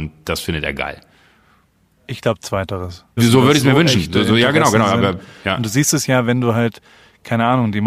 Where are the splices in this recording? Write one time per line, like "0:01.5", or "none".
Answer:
0:03.2